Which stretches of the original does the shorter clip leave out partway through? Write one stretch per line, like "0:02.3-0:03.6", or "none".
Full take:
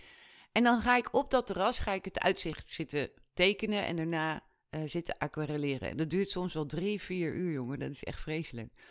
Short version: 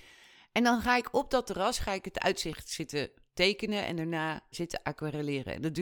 0:04.5-0:04.9